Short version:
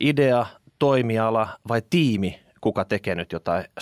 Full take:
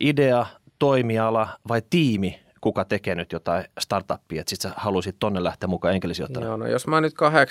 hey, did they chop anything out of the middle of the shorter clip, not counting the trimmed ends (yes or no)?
no